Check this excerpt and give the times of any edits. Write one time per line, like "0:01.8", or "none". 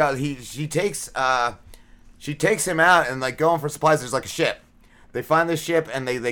none